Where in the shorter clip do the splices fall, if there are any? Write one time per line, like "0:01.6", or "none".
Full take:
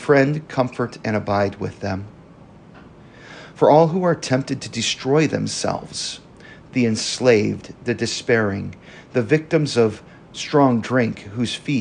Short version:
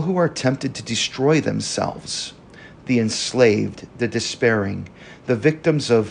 none